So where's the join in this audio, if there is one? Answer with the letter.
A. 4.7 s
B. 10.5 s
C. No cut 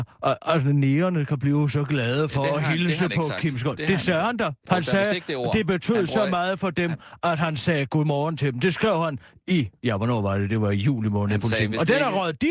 A